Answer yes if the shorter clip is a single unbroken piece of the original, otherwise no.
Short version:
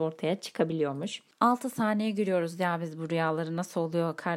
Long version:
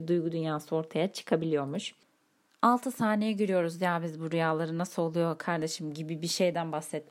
no